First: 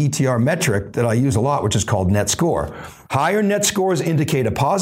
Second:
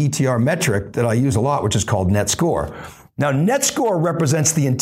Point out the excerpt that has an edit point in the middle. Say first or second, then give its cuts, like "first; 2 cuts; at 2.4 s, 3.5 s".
first; 1 cut; at 3.1 s